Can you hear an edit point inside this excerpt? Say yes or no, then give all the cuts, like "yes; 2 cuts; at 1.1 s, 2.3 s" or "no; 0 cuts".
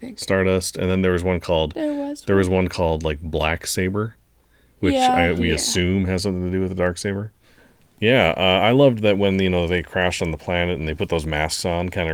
no; 0 cuts